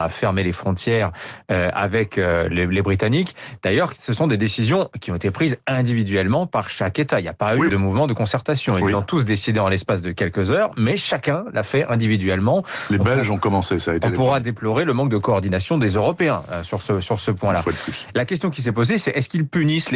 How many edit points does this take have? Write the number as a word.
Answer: one